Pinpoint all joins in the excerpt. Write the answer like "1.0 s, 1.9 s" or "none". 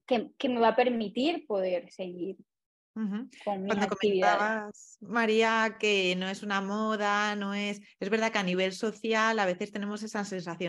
none